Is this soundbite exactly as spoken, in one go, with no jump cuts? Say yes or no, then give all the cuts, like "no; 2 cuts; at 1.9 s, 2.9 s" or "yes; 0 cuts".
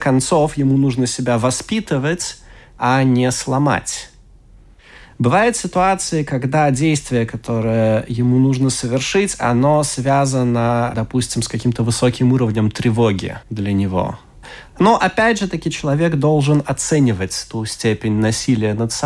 no; 2 cuts; at 13.4 s, 14.7 s